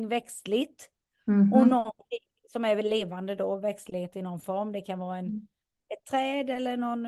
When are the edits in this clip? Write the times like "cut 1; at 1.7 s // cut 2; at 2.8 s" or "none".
none